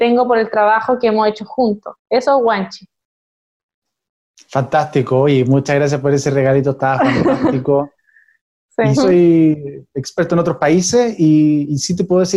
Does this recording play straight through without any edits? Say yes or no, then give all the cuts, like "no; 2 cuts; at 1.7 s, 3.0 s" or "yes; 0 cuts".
no; 1 cut; at 8.9 s